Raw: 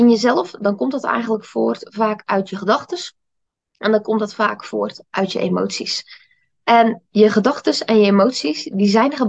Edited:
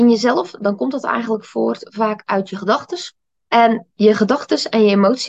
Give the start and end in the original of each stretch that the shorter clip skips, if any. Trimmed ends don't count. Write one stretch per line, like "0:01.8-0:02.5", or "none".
0:03.5-0:06.6

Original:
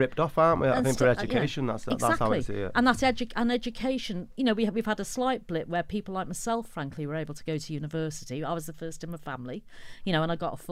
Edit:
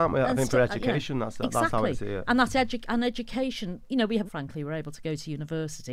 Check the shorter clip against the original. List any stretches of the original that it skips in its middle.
0:04.7-0:06.7

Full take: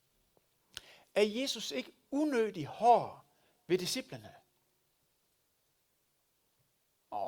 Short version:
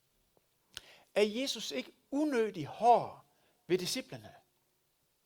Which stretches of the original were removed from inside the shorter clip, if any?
none

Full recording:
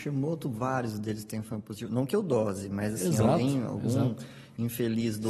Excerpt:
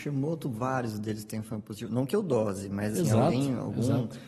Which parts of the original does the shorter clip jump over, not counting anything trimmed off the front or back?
0:03.0-0:03.0

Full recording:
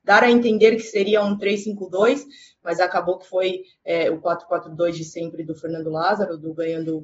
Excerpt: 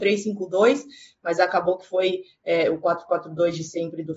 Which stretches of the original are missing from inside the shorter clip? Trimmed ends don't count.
none

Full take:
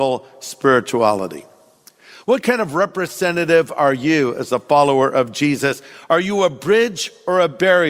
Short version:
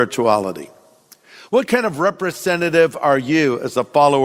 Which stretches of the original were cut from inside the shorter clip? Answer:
none

